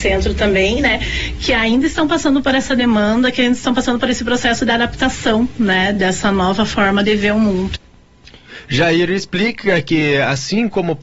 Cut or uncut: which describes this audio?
uncut